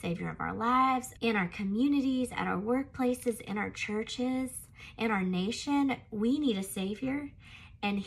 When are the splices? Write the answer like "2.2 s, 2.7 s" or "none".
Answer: 1.2 s